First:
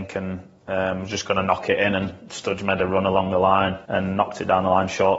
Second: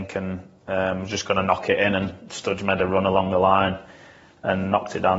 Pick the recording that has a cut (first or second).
first